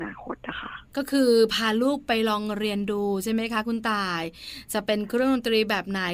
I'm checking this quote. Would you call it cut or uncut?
uncut